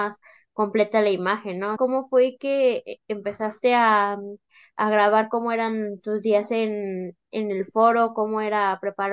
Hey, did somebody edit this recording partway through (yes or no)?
yes